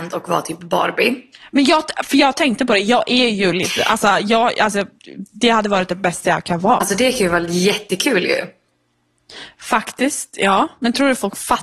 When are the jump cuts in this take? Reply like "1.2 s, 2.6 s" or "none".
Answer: 6.8 s